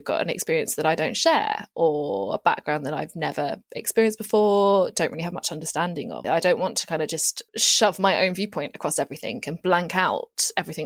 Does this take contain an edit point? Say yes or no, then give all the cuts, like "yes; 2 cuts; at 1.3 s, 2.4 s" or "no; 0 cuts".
yes; 2 cuts; at 6.2 s, 7.5 s